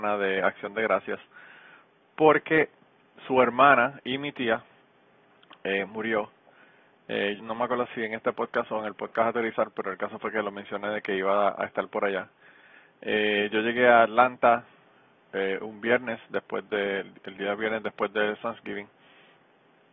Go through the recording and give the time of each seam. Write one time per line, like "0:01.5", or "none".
0:07.4